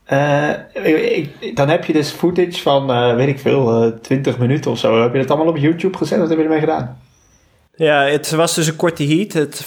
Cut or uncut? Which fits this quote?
uncut